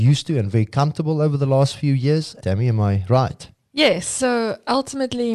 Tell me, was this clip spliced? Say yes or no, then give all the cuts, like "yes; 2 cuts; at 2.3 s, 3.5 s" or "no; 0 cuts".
yes; 1 cut; at 2.4 s